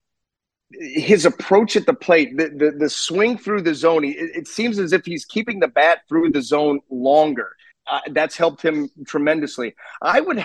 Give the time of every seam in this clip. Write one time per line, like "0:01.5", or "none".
0:07.7

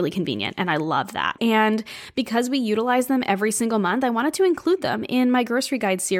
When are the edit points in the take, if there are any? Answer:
0:01.4

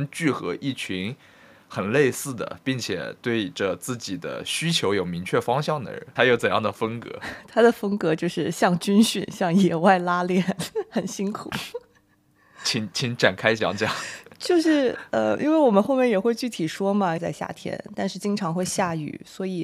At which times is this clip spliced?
0:06.2
0:17.2

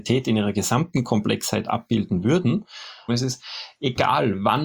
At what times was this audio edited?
0:03.1

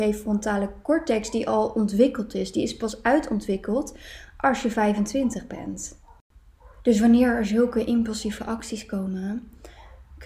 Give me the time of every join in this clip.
none

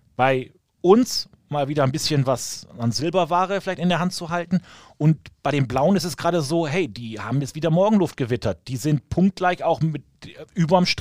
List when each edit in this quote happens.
none

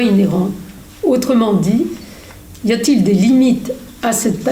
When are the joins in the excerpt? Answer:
0:02.6

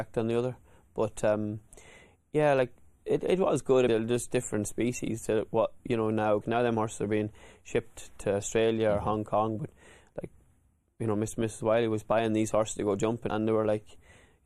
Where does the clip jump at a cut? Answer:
0:03.9
0:06.4
0:13.3

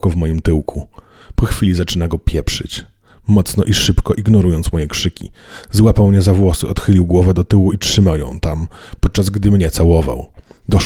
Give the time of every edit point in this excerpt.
none

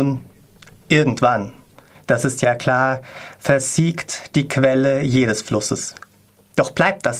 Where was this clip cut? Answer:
none

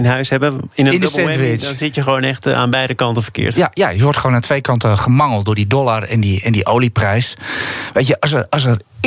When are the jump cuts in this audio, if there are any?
none

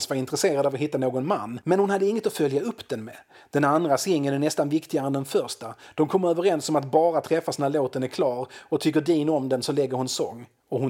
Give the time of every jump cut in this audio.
0:05.9

